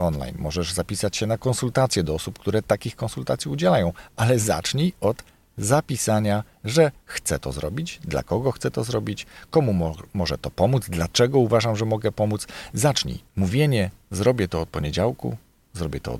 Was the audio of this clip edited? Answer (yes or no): yes